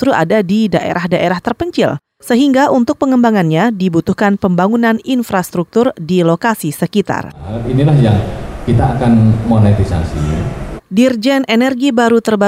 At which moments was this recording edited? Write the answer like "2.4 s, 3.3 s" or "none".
10.8 s